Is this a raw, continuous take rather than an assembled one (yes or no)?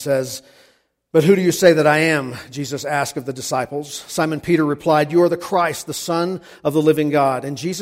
yes